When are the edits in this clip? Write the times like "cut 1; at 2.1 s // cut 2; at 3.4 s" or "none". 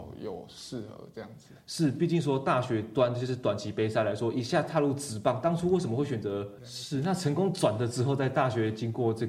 cut 1; at 6.6 s

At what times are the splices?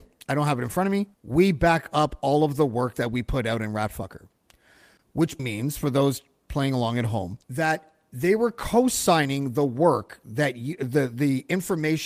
cut 1; at 1.1 s // cut 2; at 5.4 s // cut 3; at 7.4 s

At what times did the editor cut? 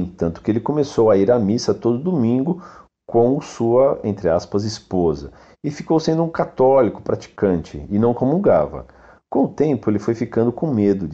none

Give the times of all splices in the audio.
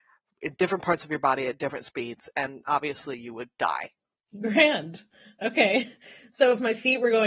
none

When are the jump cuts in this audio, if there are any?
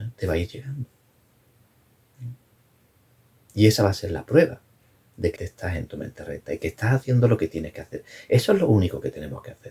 cut 1; at 5.4 s

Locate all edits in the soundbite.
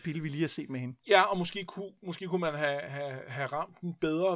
none

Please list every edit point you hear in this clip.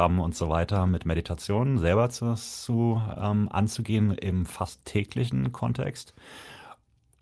none

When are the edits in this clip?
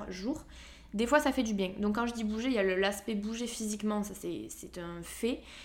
none

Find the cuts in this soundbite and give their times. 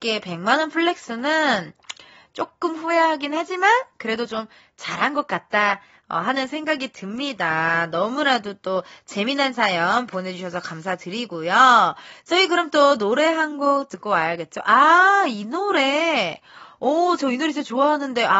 none

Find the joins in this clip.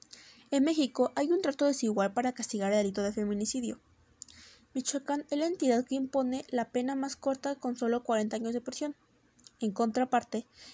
none

